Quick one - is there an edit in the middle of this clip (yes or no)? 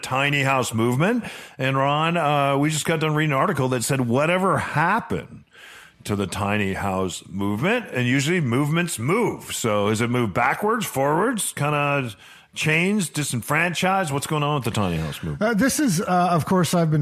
no